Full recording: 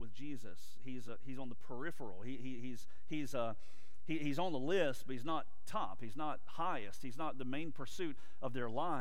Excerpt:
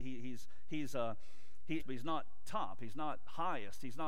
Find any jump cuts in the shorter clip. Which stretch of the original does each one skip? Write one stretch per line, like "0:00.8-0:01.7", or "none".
0:04.2-0:05.0